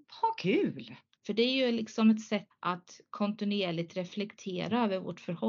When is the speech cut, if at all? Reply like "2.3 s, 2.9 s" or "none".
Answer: 1.1 s, 2.5 s